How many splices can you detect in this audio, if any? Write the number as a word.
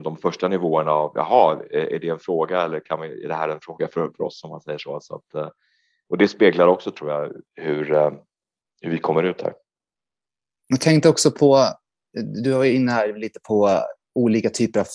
one